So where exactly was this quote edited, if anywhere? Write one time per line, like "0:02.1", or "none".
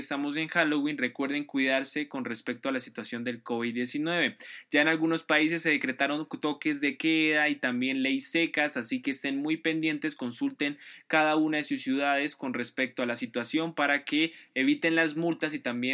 none